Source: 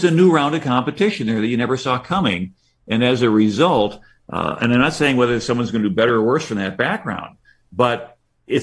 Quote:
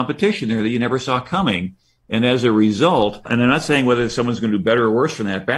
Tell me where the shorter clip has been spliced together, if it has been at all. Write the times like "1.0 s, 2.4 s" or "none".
3.3 s